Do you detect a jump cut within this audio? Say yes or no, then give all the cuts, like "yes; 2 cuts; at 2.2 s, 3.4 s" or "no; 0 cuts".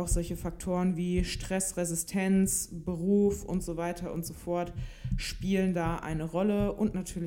no; 0 cuts